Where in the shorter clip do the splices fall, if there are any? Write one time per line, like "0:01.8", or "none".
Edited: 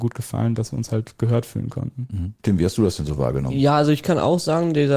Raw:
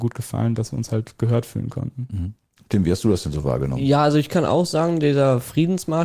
0:02.4

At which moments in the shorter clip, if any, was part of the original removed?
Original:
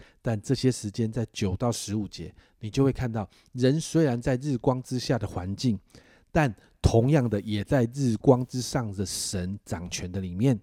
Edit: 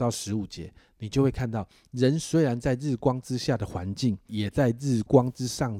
0:04.3

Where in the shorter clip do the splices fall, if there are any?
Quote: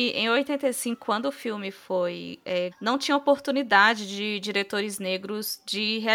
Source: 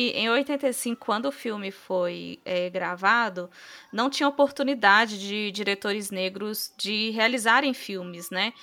0:02.7

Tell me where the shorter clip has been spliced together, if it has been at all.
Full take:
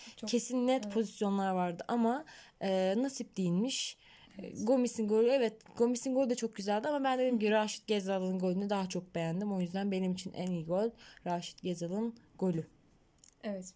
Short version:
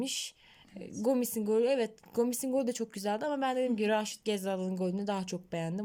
none

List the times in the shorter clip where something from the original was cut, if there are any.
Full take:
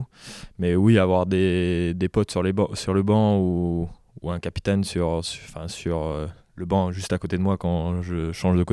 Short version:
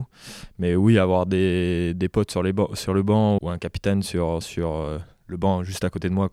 0:03.4
0:04.4

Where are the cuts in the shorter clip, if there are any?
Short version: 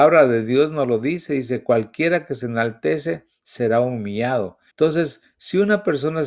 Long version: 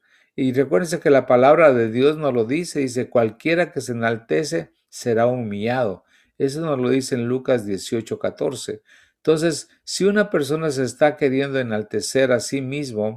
0:04.7

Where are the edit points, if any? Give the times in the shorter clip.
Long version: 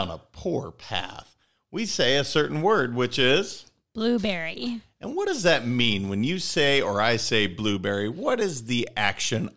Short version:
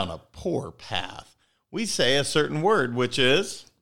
none

